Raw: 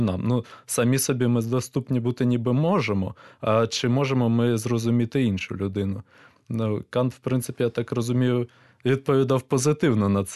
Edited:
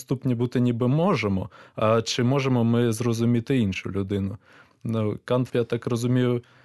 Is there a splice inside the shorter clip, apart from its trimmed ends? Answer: yes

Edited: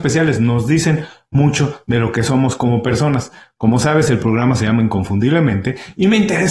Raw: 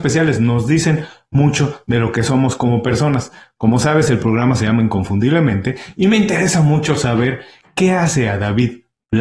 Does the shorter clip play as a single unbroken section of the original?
yes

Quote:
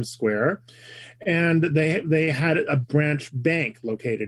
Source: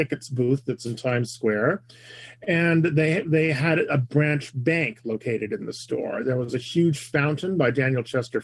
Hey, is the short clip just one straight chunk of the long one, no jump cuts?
yes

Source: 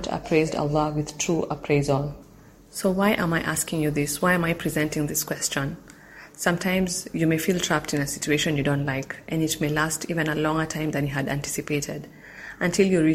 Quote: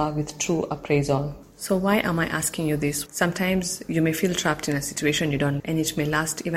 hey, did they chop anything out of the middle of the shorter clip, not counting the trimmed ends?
yes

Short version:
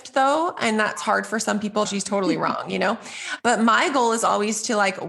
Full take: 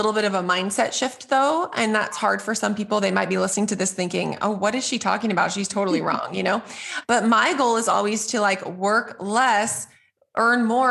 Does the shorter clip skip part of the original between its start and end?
yes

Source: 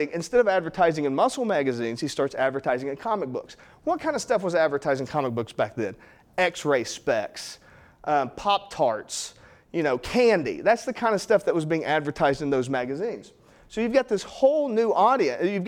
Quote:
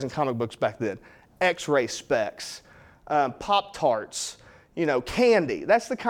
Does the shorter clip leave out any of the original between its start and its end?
no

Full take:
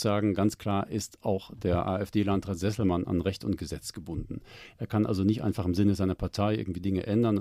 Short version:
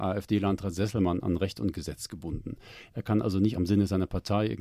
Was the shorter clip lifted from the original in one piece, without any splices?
no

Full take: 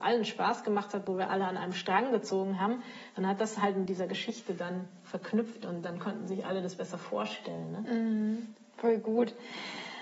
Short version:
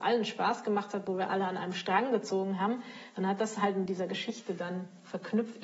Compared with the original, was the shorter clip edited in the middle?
no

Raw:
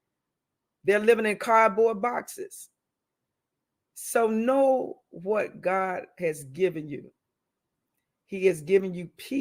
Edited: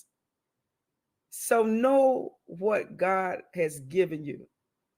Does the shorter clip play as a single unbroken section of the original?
yes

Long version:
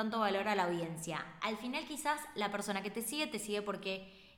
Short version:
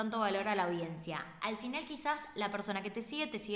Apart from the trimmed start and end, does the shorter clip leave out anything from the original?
no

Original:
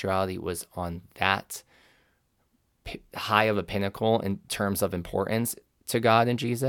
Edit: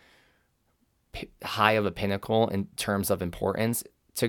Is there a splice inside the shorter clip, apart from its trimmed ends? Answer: no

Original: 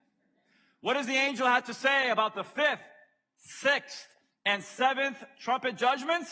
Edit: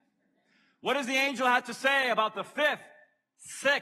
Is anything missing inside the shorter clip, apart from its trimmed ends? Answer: no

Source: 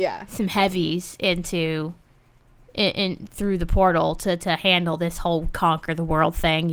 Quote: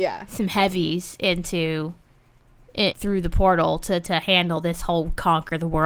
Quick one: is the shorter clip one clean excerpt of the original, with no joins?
no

